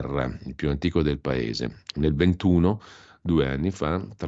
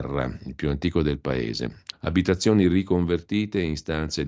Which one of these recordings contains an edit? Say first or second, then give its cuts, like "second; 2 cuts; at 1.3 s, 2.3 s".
second; 1 cut; at 1.9 s